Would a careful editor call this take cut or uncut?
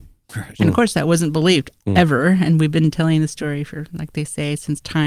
uncut